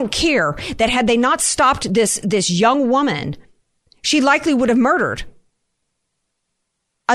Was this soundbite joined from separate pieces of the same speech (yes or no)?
no